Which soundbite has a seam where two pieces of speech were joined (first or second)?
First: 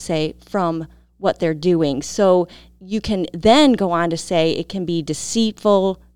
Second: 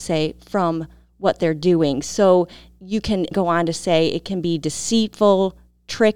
second